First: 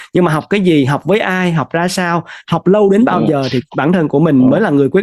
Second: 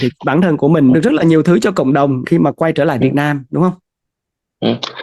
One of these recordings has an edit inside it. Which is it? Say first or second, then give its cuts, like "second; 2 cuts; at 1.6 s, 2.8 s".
second; 2 cuts; at 0.9 s, 2.2 s